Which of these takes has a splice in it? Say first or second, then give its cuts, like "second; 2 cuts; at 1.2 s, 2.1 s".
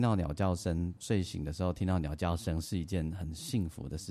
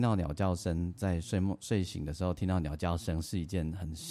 first; 1 cut; at 1.0 s